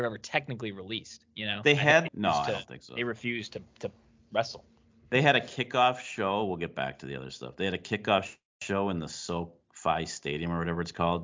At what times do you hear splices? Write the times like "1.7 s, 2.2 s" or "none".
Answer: 2.1 s